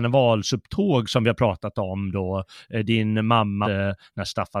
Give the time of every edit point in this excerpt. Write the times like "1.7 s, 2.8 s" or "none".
3.6 s